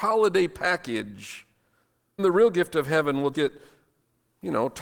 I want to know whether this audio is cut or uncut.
cut